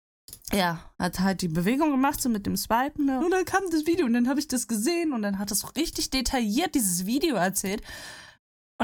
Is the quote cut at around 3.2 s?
yes; 1 cut; at 3.2 s

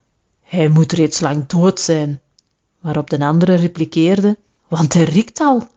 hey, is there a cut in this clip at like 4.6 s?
yes; 1 cut; at 4.6 s

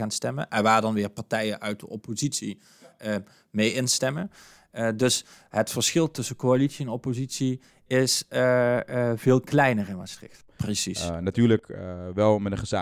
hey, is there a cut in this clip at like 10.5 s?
yes; 1 cut; at 10.5 s

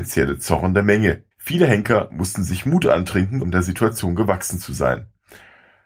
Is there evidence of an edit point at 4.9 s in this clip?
no; 2 cuts; at 1.3 s, 3.4 s

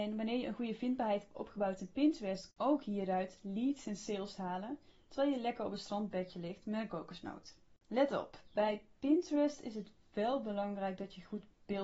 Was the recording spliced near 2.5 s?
no; 0 cuts

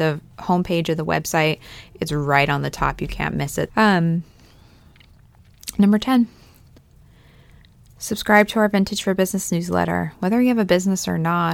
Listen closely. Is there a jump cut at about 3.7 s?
yes; 1 cut; at 3.7 s

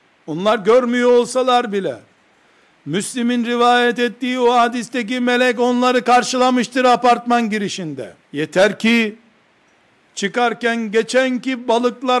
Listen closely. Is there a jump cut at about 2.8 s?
no; 1 cut; at 8.2 s

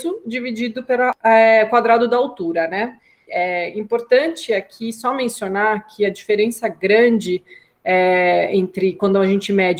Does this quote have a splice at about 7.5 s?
no; 1 cut; at 3.3 s

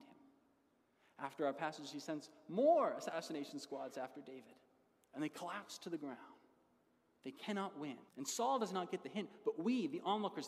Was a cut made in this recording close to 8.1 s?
yes; 1 cut; at 8.1 s

